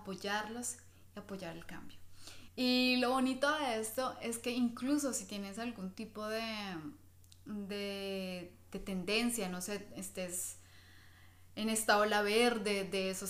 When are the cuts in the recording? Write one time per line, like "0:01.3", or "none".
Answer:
0:02.5